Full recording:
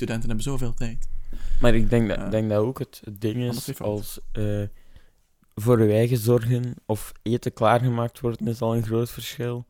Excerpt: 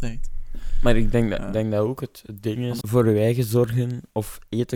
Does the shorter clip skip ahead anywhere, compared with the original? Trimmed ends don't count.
yes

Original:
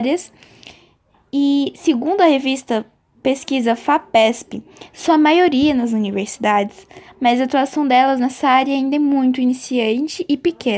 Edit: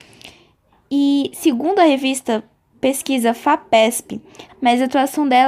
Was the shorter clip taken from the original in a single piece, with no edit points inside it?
no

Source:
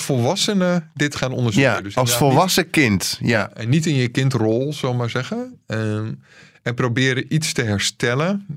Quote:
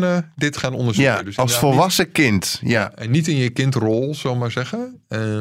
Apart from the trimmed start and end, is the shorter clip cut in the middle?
no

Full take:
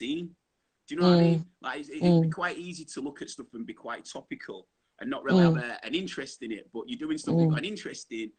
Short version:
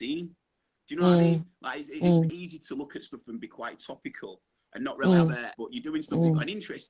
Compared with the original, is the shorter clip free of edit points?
no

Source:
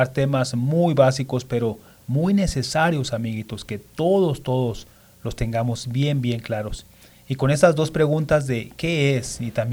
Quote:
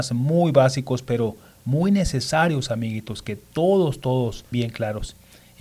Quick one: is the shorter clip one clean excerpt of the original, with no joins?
no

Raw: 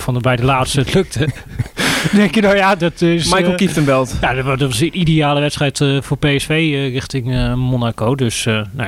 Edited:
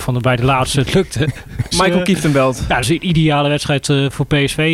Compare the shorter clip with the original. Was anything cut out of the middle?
yes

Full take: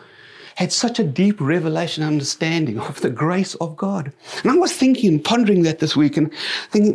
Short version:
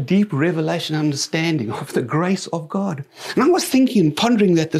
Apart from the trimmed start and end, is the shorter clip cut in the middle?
no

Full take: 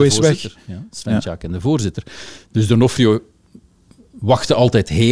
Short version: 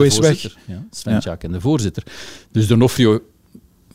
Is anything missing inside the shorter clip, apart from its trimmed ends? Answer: no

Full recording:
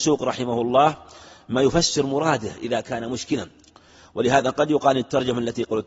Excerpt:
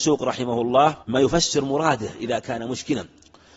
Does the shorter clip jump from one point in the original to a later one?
yes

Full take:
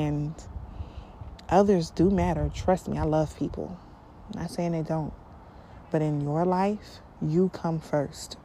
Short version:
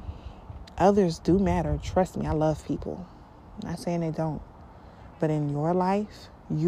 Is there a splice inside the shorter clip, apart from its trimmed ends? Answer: no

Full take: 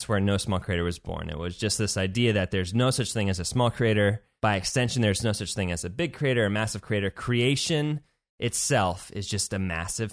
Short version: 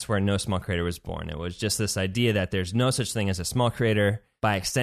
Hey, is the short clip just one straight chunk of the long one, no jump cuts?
yes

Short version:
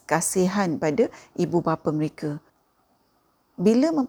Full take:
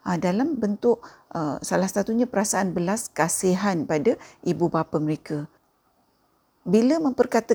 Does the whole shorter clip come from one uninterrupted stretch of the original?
yes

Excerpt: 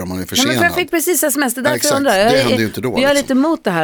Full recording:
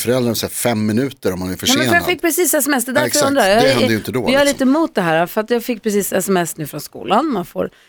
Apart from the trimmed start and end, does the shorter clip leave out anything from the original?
no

